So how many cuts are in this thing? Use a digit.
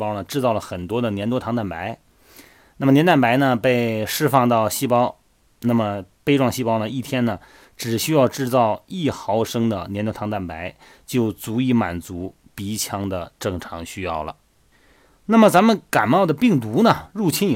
1